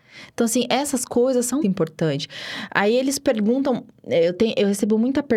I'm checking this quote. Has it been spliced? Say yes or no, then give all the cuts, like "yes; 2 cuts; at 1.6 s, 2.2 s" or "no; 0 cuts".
yes; 1 cut; at 1.6 s